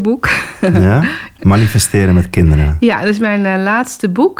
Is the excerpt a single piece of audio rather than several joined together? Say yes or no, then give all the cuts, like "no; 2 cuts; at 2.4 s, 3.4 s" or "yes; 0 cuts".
yes; 0 cuts